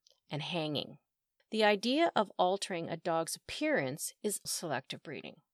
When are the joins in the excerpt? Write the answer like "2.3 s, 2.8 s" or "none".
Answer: 1.4 s, 4.5 s